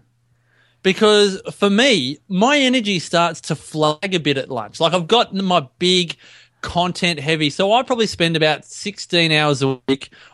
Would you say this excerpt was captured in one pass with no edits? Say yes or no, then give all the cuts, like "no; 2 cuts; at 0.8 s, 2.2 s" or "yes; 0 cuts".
yes; 0 cuts